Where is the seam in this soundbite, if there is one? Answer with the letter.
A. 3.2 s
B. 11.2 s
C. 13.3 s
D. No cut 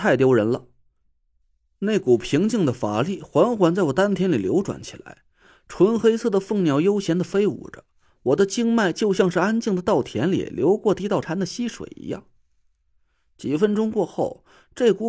B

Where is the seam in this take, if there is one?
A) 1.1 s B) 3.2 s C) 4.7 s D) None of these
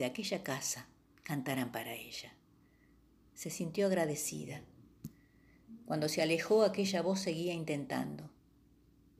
A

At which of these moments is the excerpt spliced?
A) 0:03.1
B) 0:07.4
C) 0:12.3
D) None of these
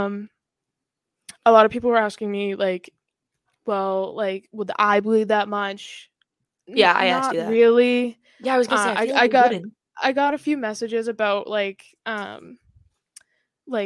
D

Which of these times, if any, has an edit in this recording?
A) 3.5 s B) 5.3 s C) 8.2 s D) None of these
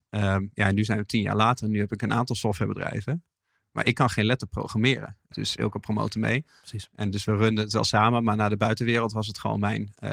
B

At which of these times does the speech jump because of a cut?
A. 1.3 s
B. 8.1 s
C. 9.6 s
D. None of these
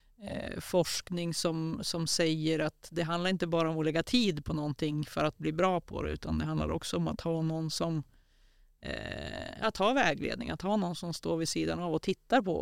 D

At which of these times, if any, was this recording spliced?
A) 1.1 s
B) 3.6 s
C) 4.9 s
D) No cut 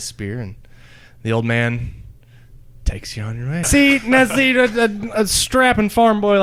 B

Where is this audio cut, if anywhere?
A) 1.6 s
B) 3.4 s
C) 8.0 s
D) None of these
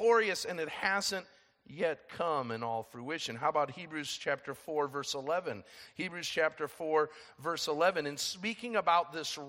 D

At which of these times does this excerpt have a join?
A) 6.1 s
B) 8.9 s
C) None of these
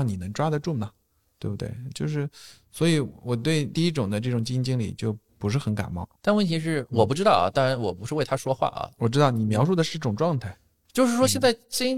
A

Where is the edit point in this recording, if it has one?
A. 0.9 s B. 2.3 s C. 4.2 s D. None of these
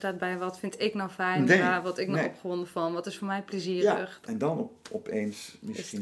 C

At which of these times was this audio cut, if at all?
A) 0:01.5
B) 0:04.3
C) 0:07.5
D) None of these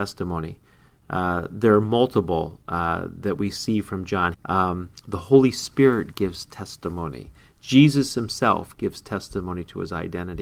B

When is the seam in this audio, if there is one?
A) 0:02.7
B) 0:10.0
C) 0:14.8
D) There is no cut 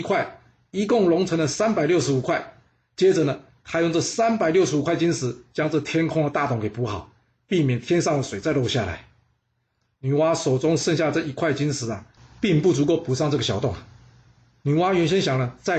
B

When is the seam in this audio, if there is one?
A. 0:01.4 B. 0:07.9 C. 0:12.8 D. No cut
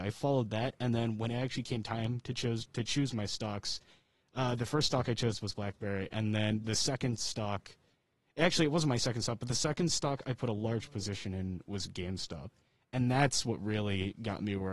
D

